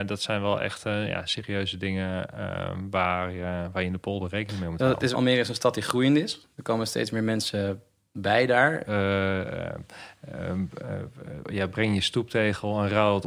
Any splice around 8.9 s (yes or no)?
yes